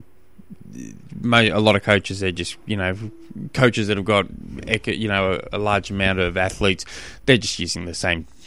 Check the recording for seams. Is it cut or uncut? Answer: uncut